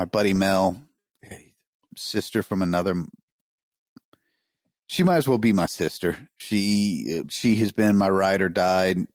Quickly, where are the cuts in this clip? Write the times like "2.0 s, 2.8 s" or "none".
7.2 s